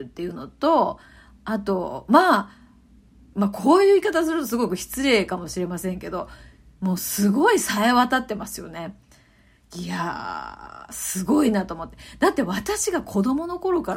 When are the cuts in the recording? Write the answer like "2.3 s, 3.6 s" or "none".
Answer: 3.3 s